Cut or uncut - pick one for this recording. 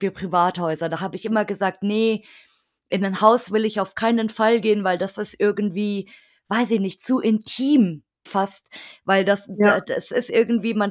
cut